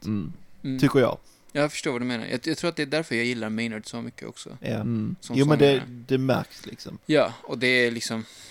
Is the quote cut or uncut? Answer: cut